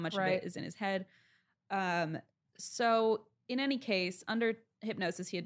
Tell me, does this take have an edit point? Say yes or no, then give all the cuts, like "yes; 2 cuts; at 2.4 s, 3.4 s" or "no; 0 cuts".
no; 0 cuts